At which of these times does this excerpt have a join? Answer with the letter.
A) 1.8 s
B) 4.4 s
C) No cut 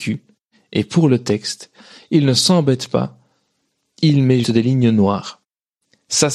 B